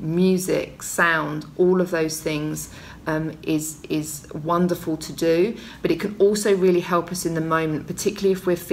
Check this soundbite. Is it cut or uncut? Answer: uncut